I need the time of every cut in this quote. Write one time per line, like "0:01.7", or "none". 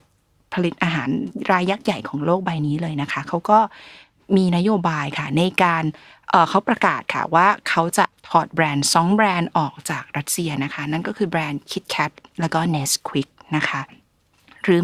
none